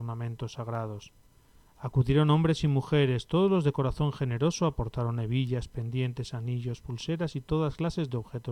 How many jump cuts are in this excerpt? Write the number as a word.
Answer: zero